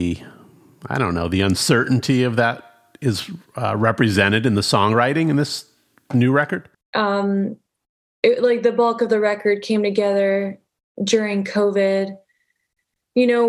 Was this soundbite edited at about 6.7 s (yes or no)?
yes